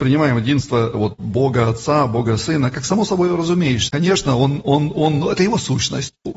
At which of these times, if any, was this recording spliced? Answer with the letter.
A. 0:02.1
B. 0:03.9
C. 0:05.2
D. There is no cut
B